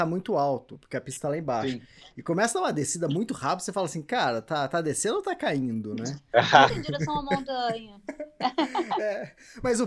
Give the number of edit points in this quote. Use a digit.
1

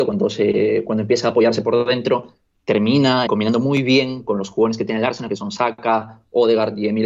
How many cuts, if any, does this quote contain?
1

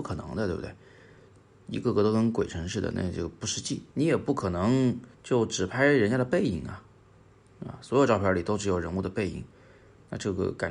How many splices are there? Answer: 2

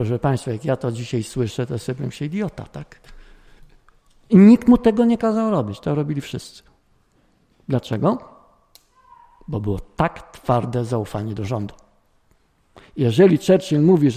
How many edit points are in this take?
1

